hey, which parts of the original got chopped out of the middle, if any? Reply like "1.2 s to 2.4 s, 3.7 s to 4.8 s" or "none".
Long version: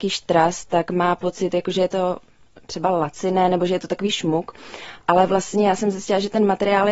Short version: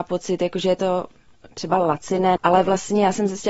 3.5 s to 5.0 s